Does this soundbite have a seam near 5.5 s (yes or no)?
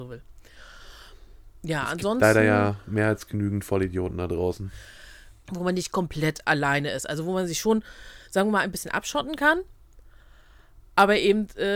yes